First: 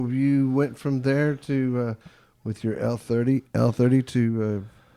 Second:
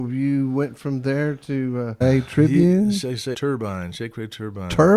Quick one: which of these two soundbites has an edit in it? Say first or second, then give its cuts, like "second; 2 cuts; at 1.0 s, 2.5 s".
second; 2 cuts; at 2.0 s, 3.3 s